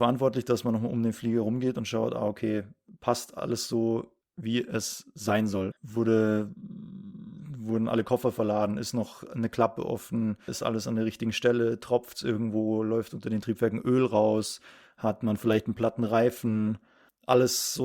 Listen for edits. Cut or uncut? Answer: cut